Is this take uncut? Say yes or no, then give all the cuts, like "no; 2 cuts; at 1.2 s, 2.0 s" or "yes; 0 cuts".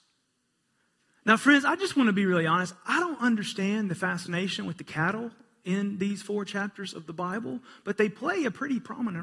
yes; 0 cuts